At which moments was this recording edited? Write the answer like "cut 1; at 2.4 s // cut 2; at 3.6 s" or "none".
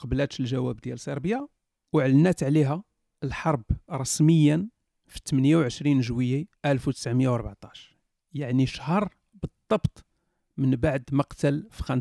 cut 1; at 6.6 s

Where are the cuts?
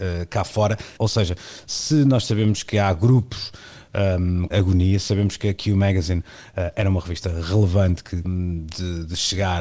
cut 1; at 1.0 s // cut 2; at 4.5 s // cut 3; at 8.2 s

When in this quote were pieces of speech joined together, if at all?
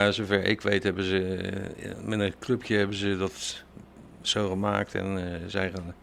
none

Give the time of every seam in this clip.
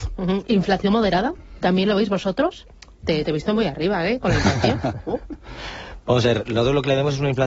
none

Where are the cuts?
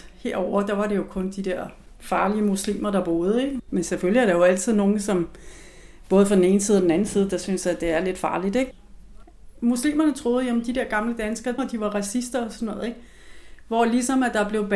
cut 1; at 9.6 s // cut 2; at 11.6 s

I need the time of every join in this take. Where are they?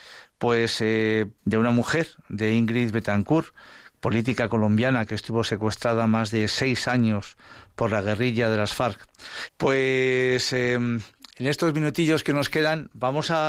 cut 1; at 1.4 s // cut 2; at 9.5 s

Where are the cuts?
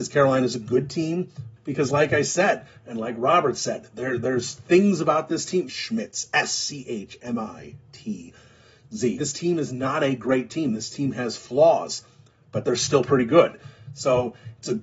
cut 1; at 1.6 s // cut 2; at 5.7 s // cut 3; at 9.2 s

